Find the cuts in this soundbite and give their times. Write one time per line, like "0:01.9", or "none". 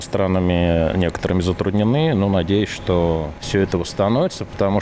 none